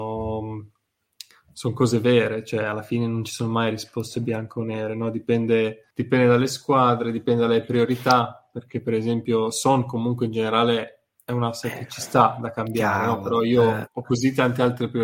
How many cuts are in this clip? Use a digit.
1